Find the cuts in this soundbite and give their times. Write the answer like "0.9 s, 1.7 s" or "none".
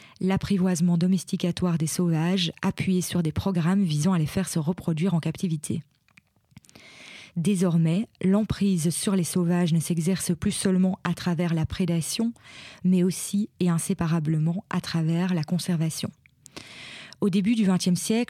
7.3 s